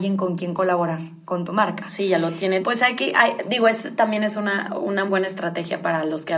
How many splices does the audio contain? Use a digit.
2